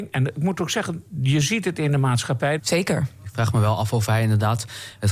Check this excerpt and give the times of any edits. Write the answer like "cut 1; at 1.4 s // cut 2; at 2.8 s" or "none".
cut 1; at 2.6 s